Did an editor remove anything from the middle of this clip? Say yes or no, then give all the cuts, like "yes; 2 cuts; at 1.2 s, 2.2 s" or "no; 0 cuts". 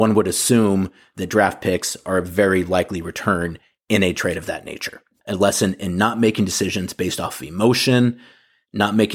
yes; 1 cut; at 5.2 s